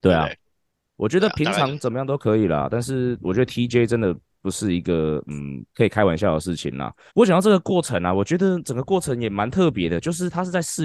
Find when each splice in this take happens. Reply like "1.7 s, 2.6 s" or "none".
7.1 s